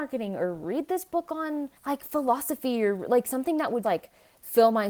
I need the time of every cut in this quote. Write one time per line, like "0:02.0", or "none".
0:01.8
0:03.8